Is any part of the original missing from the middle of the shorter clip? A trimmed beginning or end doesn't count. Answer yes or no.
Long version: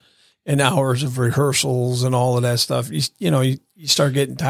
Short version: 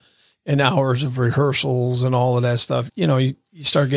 yes